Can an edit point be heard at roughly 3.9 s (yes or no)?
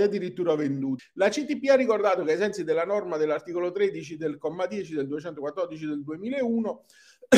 no